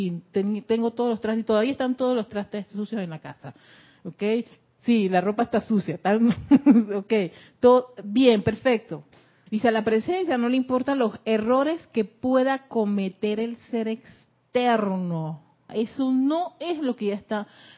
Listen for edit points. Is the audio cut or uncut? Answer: cut